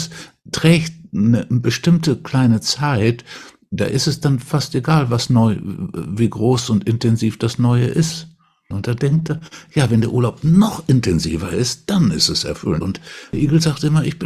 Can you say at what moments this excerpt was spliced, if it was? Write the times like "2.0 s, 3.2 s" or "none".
8.7 s, 12.8 s

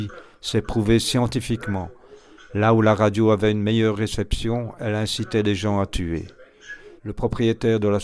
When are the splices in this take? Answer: 7.0 s

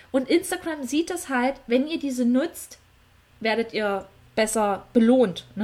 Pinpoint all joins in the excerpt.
3.3 s

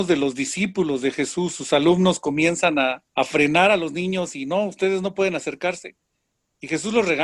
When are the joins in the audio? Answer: 3.1 s

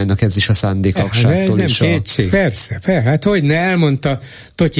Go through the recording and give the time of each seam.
0.9 s, 2.3 s

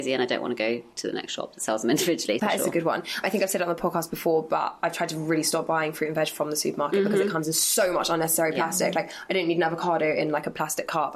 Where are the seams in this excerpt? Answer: 2.4 s

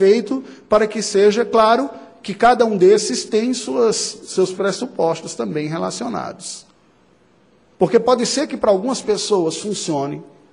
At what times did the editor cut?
7.7 s

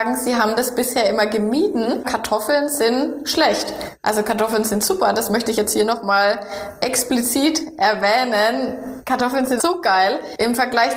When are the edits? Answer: 2.0 s, 9.6 s

